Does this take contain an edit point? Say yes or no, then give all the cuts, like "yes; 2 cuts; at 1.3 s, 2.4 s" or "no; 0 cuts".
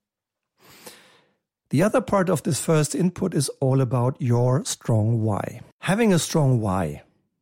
yes; 1 cut; at 5.7 s